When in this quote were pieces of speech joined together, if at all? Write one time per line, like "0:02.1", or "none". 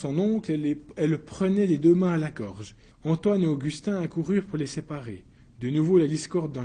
0:02.9
0:05.4

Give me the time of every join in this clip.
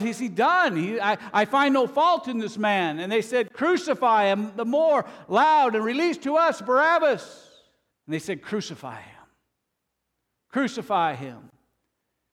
0:07.9

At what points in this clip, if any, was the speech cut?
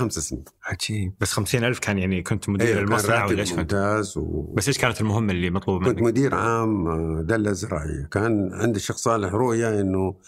none

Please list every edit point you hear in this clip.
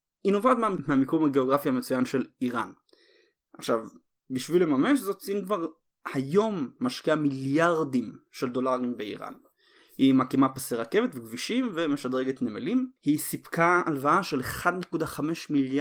0:03.4
0:13.0

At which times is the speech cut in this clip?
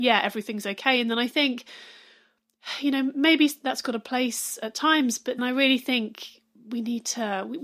0:05.4

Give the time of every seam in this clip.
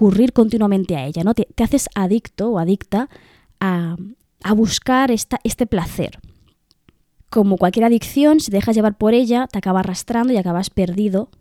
none

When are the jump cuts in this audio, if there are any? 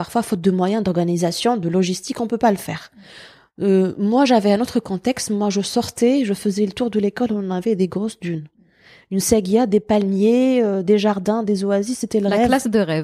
none

